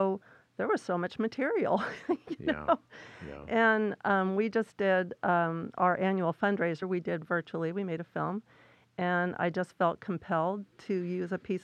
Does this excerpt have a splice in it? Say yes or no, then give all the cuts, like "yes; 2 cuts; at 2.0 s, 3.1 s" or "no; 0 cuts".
no; 0 cuts